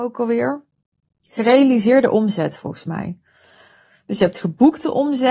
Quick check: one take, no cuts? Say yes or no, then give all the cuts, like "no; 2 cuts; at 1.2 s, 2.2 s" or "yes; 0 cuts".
yes; 0 cuts